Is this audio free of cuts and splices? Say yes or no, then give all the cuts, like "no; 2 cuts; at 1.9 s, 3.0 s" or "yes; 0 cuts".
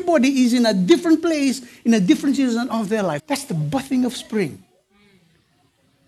no; 1 cut; at 3.2 s